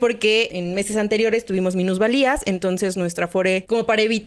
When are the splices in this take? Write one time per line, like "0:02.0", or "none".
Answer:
none